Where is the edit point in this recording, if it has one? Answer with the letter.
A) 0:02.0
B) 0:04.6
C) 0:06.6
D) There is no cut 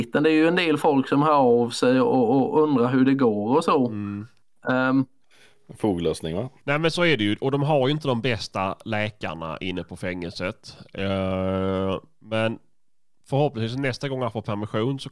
C